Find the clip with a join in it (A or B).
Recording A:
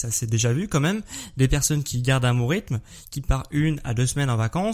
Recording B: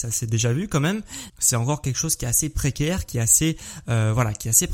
B